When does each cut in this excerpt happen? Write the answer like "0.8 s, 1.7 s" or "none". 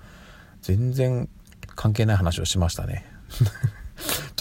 none